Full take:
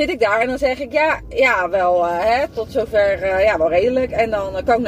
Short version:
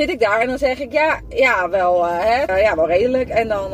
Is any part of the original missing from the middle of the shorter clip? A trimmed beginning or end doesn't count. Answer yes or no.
yes